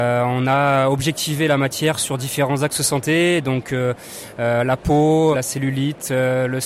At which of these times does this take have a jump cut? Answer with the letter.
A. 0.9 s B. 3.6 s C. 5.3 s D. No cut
C